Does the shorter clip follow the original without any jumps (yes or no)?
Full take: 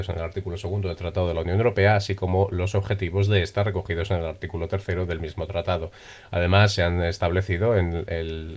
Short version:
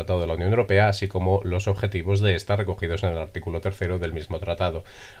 yes